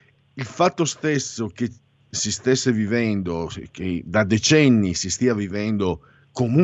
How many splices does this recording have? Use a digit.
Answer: 0